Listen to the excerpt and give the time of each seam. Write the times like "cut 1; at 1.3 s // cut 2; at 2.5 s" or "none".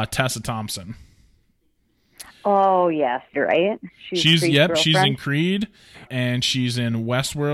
cut 1; at 3.3 s // cut 2; at 6.1 s